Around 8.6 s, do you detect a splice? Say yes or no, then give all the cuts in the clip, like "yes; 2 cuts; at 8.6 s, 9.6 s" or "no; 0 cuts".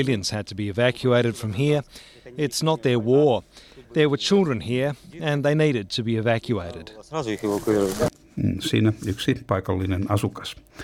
no; 0 cuts